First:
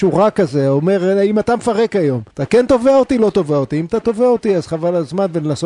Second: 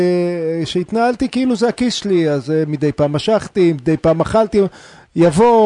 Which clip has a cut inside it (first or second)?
first